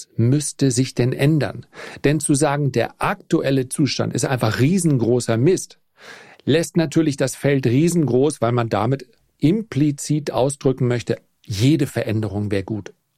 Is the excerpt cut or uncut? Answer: uncut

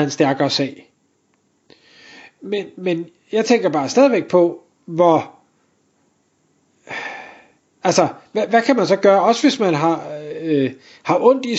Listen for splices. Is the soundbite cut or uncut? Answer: cut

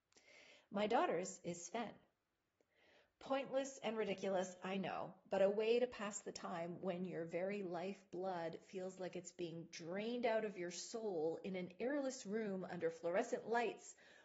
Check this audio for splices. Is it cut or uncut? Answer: uncut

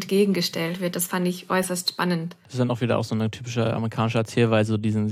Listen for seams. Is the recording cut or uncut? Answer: uncut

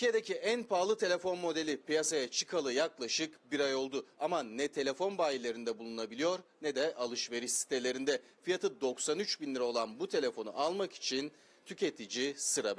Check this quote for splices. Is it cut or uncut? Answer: uncut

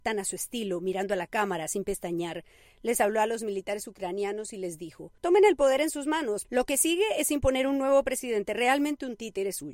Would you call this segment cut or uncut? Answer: cut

